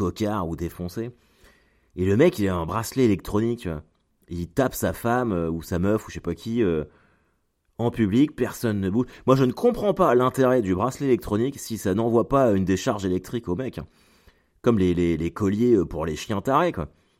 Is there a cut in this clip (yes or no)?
no